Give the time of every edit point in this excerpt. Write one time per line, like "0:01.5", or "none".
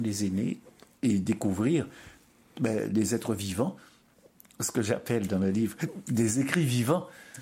none